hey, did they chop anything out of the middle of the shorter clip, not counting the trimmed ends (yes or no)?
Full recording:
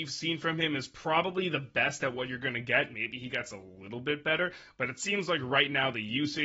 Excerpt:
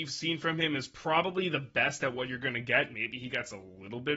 no